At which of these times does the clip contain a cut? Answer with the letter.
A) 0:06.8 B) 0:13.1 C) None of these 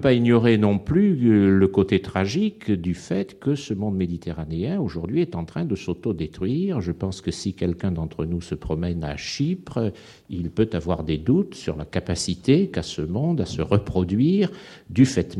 C